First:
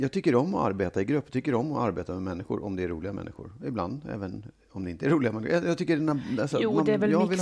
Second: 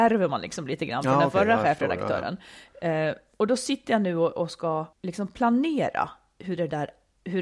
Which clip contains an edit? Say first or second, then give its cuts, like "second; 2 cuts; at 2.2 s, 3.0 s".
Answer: second; 1 cut; at 4.9 s